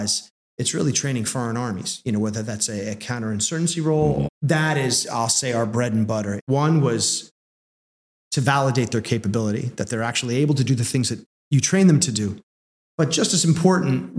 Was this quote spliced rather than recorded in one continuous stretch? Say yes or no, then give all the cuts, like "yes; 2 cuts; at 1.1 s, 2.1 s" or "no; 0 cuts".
yes; 2 cuts; at 4.2 s, 6.4 s